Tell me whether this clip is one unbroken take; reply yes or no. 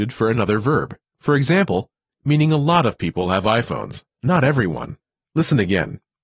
no